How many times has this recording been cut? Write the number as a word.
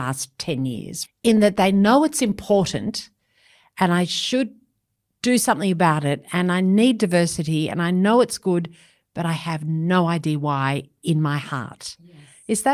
one